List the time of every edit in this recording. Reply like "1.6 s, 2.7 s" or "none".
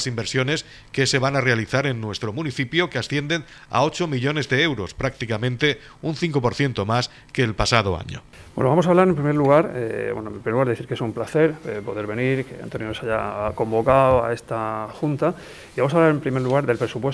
none